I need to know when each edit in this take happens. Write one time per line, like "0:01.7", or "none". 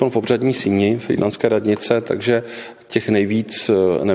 none